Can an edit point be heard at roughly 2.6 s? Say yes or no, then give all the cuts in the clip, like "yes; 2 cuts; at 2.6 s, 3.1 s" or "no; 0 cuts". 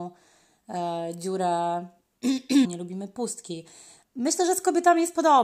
yes; 2 cuts; at 2.6 s, 4.0 s